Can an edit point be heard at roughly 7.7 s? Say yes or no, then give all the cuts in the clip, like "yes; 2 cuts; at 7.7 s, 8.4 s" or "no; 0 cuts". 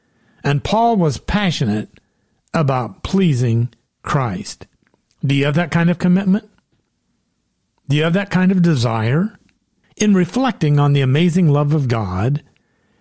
no; 1 cut; at 9.8 s